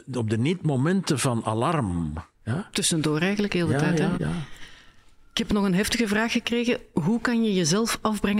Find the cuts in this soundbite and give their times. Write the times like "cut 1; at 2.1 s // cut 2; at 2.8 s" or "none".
cut 1; at 2.3 s // cut 2; at 4.1 s